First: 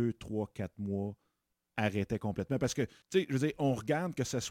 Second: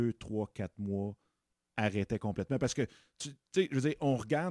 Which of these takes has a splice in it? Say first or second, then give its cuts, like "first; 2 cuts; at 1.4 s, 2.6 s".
first; 1 cut; at 3.0 s